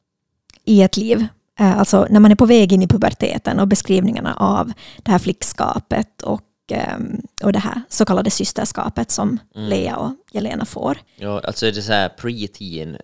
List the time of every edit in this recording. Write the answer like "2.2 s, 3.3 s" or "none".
11.1 s